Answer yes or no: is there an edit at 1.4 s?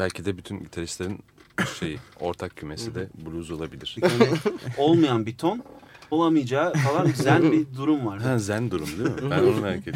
no